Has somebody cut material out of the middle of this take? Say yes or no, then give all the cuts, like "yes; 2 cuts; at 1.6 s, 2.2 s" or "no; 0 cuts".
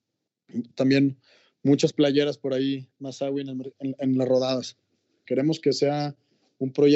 yes; 2 cuts; at 3.7 s, 5.2 s